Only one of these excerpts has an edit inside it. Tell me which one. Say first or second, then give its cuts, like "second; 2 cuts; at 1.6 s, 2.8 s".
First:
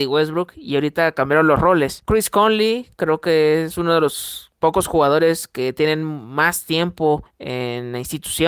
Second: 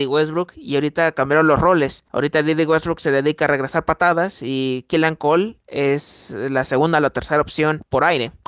first; 1 cut; at 2.0 s